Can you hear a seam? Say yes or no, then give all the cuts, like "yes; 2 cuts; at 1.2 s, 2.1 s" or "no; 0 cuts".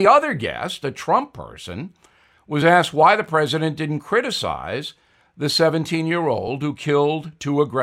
no; 0 cuts